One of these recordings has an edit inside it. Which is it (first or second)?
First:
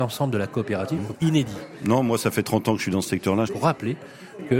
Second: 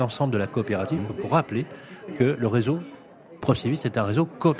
first